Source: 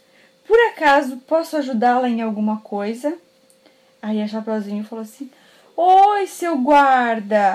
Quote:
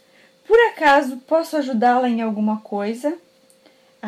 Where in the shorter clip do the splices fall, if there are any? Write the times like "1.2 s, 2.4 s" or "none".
none